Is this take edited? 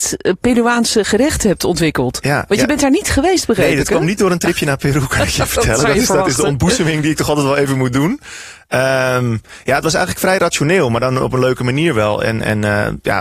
no; 0 cuts

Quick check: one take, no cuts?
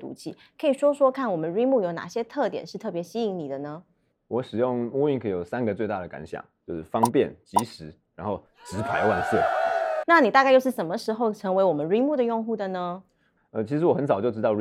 no; 1 cut; at 10.0 s

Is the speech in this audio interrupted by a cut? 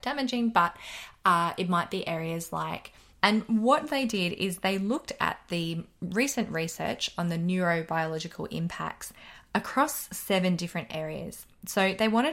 yes; 1 cut; at 3.1 s

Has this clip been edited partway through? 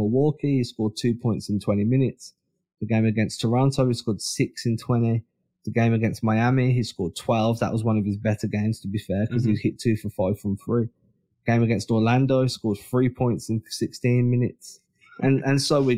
no; 0 cuts

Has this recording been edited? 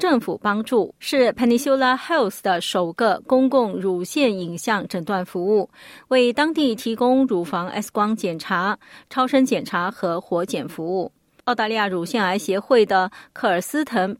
yes; 1 cut; at 1.0 s

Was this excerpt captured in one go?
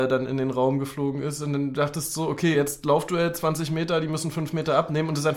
yes; 0 cuts

